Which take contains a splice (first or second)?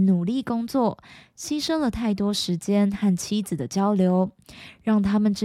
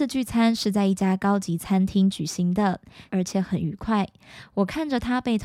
second